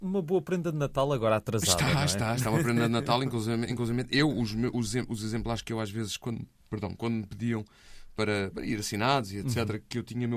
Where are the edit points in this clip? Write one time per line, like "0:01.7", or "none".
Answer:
none